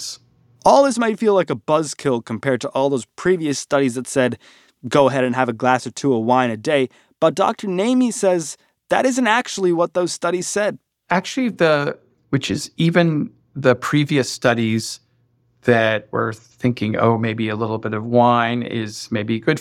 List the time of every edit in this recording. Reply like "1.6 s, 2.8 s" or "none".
12.1 s